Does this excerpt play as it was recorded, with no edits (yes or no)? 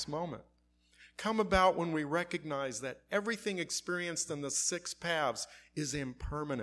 yes